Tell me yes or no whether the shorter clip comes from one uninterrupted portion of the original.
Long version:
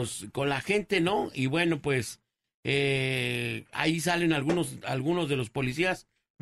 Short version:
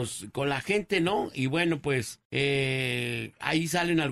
no